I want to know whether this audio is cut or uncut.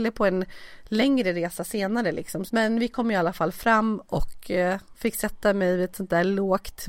cut